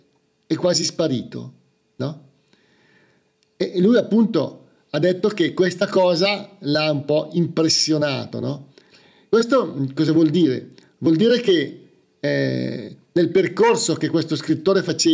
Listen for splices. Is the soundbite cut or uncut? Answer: uncut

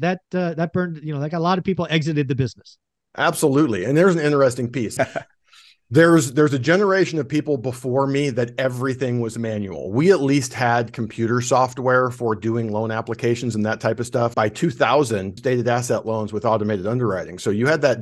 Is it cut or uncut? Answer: cut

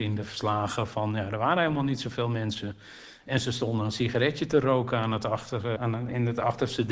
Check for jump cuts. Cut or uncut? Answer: cut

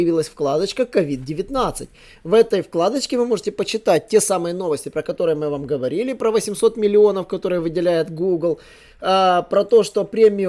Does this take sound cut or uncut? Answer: uncut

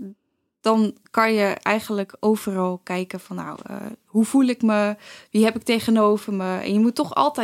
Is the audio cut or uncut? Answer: uncut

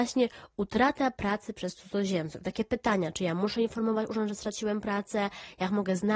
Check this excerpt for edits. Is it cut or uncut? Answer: uncut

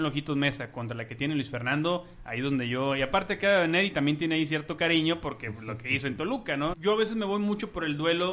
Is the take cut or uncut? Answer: cut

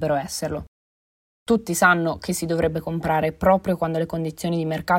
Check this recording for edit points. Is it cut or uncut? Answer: uncut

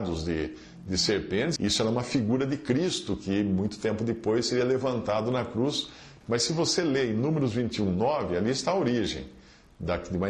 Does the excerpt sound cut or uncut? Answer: cut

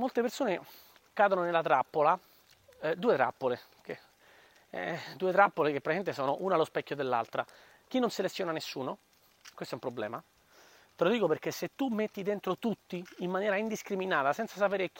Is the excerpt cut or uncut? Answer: uncut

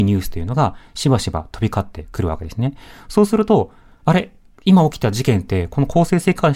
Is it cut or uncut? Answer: uncut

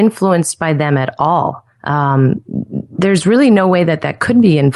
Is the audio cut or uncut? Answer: cut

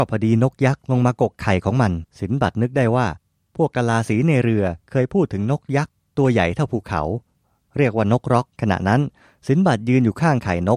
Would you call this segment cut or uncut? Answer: cut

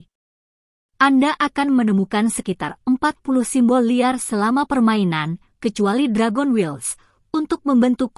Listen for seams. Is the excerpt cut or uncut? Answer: cut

